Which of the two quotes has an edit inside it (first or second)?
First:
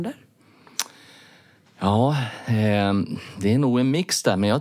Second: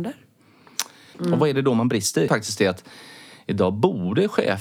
second